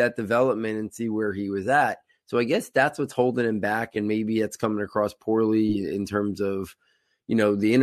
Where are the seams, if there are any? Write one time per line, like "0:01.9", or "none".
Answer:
none